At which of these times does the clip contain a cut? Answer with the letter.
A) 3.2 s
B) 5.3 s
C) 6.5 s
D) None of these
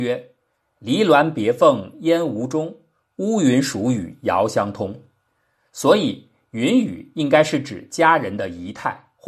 B